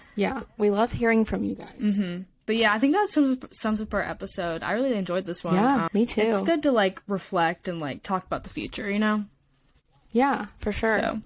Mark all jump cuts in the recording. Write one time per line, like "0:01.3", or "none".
0:05.9